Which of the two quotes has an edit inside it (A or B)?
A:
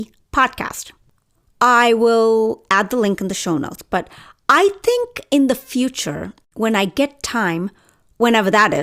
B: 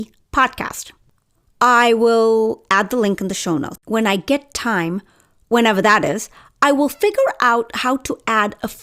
B